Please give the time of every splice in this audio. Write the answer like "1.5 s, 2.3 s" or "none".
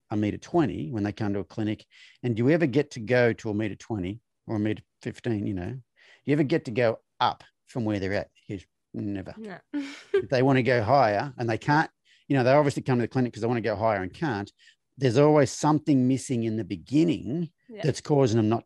17.6 s